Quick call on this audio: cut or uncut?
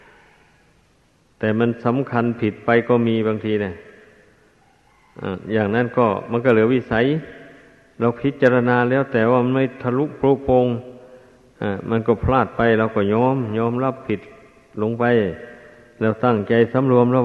uncut